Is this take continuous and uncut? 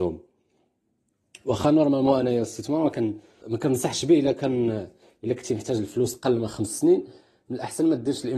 no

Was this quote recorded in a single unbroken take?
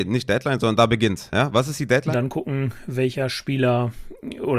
no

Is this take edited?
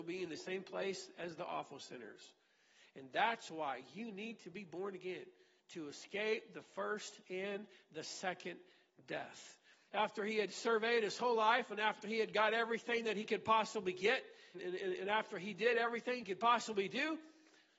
yes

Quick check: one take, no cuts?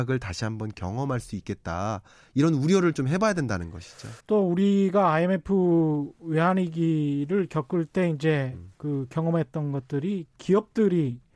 no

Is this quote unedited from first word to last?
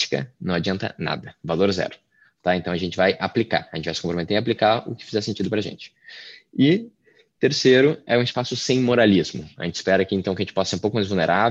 yes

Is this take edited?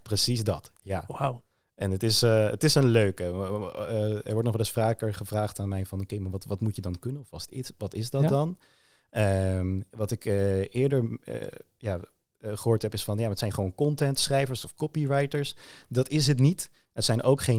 no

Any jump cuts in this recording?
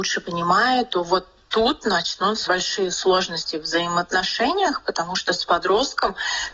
yes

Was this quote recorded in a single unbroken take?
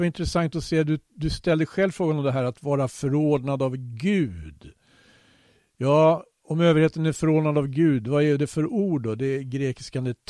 yes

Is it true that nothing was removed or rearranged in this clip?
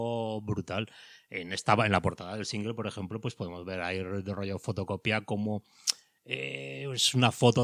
yes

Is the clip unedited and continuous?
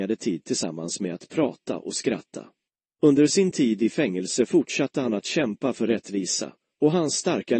no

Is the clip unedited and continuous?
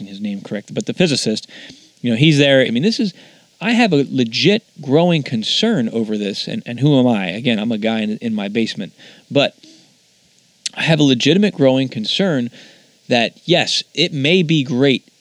no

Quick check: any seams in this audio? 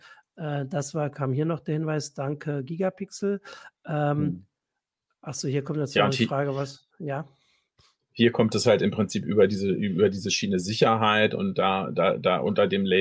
no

